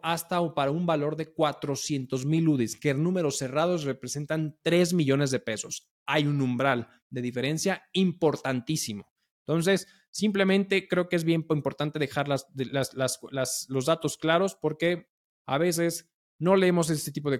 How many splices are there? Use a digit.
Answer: 0